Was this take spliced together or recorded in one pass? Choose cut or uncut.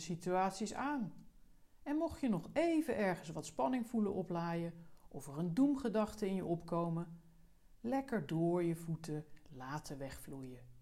uncut